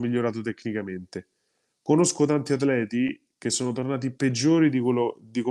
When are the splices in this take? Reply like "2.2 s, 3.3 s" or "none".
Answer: none